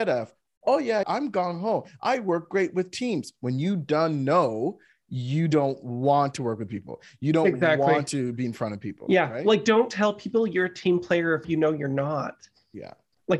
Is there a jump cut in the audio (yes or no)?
yes